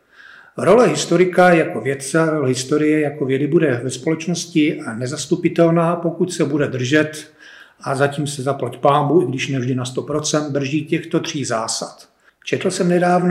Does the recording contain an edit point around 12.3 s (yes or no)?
yes